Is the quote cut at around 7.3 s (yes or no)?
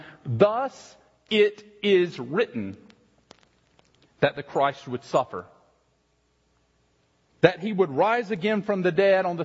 yes